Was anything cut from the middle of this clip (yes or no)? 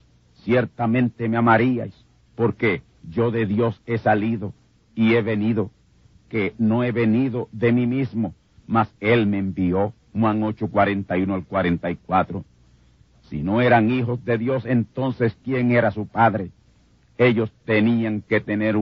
no